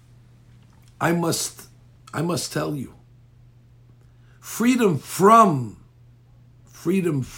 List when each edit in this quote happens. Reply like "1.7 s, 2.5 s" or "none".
none